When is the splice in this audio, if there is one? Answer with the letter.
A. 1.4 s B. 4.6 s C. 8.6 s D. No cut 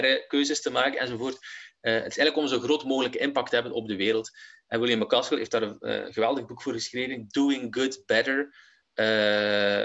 D